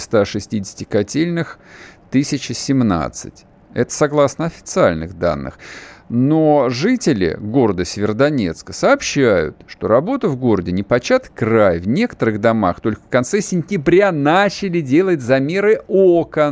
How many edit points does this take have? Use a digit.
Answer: 0